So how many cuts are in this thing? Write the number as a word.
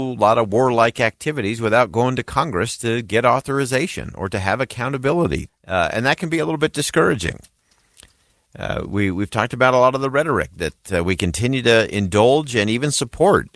one